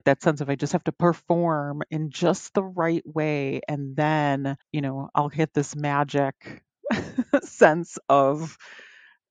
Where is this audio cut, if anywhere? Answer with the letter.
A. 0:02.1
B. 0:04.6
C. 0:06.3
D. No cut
B